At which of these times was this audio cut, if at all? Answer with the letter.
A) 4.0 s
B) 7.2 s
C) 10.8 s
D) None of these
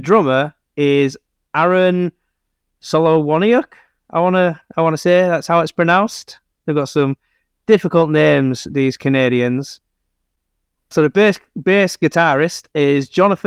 C